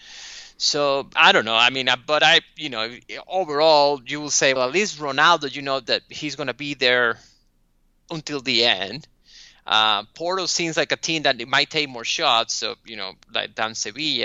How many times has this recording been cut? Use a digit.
1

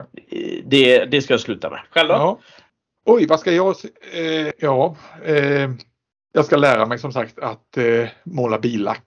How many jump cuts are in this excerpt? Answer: 2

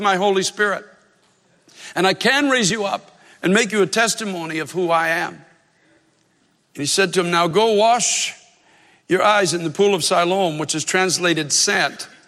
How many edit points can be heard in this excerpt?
0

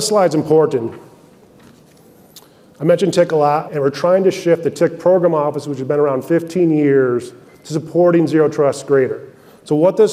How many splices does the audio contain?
1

